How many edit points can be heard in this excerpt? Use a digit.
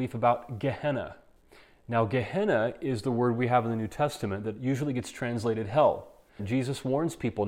1